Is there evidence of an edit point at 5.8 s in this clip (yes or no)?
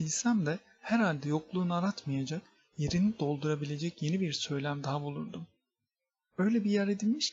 no